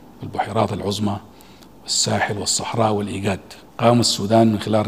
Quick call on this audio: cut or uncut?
cut